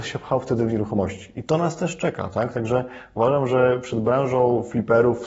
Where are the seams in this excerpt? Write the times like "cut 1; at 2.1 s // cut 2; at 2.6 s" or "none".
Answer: none